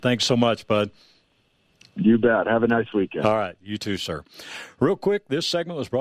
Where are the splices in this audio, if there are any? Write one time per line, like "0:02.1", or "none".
none